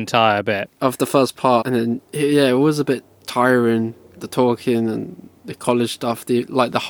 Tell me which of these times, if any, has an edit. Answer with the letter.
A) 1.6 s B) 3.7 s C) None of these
A